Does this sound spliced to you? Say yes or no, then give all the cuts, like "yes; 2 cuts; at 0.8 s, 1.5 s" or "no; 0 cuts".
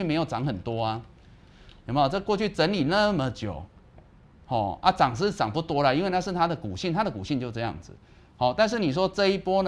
no; 0 cuts